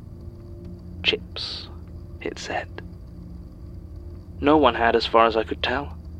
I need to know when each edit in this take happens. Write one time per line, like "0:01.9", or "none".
0:04.4